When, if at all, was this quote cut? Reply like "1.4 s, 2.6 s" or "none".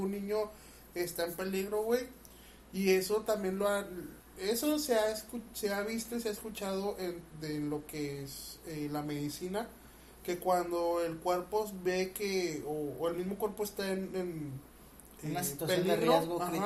none